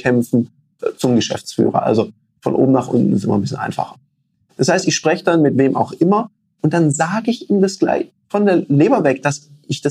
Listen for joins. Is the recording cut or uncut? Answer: uncut